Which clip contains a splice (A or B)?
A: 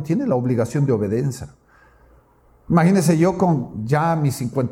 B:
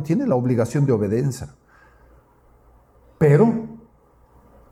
A